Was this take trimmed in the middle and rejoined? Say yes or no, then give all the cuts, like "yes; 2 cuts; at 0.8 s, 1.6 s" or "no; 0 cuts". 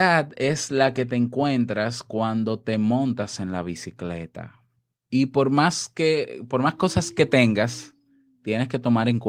no; 0 cuts